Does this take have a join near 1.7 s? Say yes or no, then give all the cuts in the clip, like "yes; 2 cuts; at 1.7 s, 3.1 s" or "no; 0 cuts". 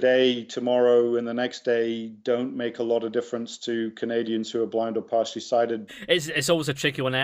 no; 1 cut; at 5.9 s